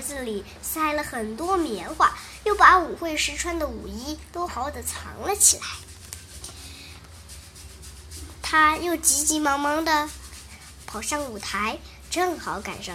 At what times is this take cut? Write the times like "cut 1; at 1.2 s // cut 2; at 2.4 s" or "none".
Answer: cut 1; at 4.5 s

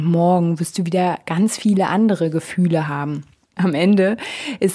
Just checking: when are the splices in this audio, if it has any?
cut 1; at 3.6 s

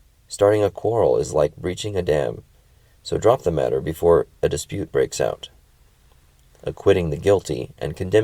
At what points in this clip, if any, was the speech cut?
none

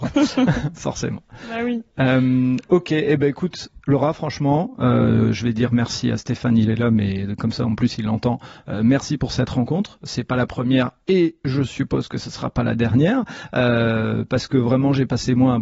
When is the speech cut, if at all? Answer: none

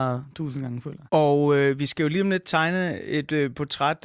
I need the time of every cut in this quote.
cut 1; at 1.1 s

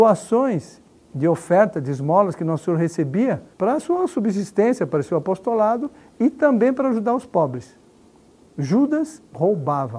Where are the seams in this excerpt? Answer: cut 1; at 3.5 s

